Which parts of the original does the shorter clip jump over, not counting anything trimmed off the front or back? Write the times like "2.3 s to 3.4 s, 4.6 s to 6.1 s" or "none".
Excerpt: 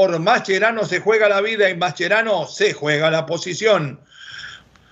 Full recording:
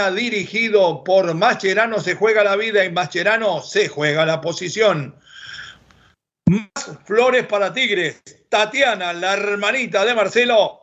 none